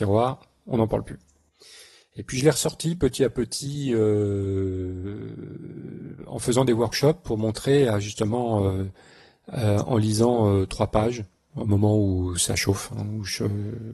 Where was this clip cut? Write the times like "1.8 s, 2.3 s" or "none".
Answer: none